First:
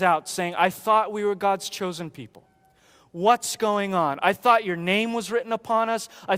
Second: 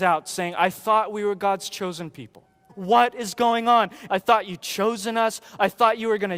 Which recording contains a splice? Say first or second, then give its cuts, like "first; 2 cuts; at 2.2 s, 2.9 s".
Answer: second; 2 cuts; at 2.7 s, 4.1 s